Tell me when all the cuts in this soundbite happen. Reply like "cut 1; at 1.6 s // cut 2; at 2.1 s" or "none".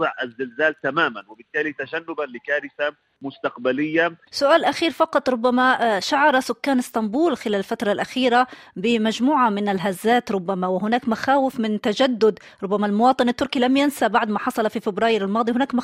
none